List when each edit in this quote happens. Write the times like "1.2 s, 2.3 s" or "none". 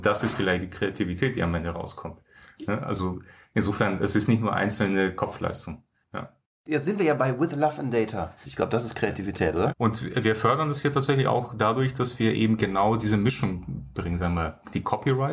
8.4 s, 9.7 s

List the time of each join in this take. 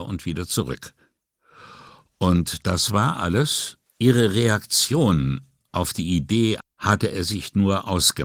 3.9 s, 6.6 s

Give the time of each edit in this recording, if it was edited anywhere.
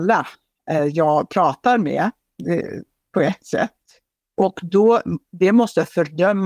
4.3 s

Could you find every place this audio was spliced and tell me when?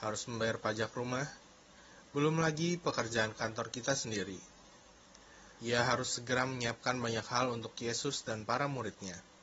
5.6 s

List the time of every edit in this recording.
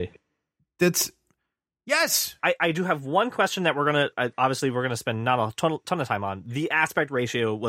2.4 s, 4.1 s

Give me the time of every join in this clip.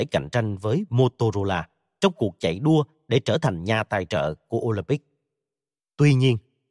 5.8 s

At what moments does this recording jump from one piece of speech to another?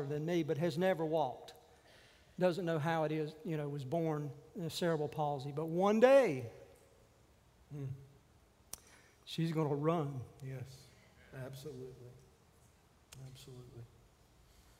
none

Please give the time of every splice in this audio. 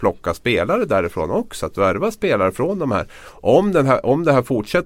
none

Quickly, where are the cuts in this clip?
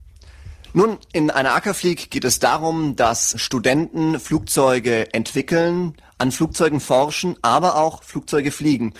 none

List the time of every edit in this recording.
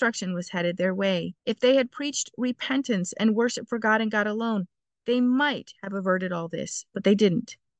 1.4 s

